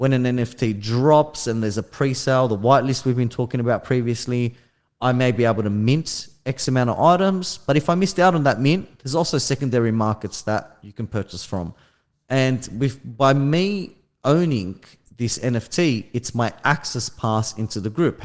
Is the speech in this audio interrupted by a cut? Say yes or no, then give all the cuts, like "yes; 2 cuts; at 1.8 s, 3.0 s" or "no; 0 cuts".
yes; 1 cut; at 12.1 s